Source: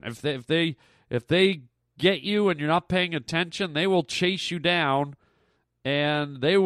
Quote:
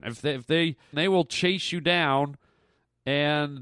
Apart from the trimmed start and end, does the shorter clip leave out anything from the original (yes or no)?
yes